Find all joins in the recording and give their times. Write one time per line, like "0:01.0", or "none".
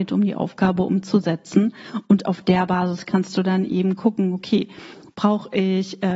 none